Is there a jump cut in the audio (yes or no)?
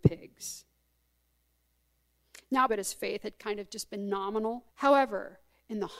yes